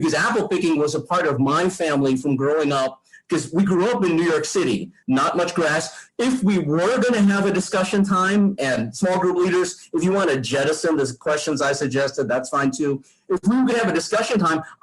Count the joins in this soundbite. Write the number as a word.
two